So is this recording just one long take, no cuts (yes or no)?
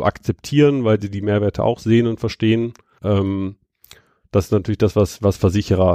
no